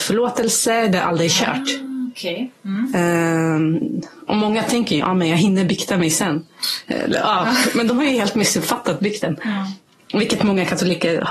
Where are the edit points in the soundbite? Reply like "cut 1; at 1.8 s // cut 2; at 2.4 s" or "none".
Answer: cut 1; at 5.0 s